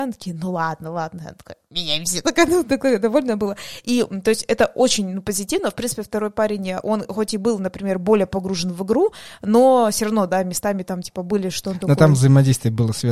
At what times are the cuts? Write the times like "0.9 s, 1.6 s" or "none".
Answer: none